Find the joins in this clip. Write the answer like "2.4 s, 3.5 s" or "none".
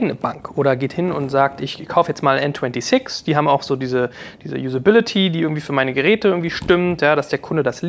none